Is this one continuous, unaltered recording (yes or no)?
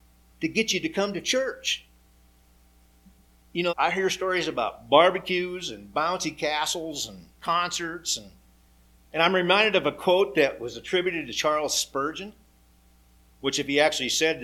no